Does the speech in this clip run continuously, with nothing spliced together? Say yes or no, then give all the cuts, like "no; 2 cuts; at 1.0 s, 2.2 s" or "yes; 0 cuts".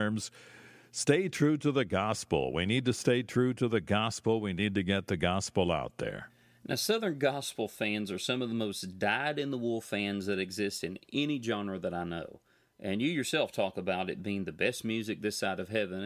yes; 0 cuts